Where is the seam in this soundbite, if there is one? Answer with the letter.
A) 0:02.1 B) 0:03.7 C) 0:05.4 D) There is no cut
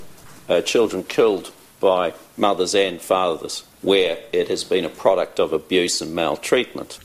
B